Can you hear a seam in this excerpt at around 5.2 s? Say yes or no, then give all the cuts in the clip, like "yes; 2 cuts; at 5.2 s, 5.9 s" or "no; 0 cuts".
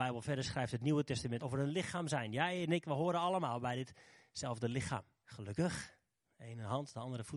yes; 2 cuts; at 1.4 s, 5.2 s